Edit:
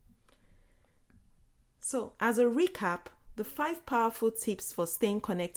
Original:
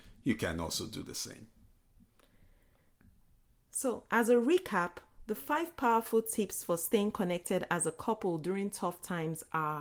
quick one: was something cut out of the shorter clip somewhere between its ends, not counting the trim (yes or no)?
no